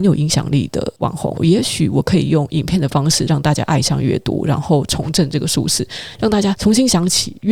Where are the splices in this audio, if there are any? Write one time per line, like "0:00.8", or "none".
0:01.4